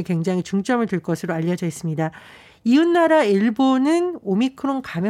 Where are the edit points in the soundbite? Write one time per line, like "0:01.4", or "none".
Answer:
none